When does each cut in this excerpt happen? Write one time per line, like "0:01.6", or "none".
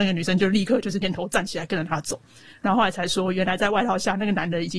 0:01.0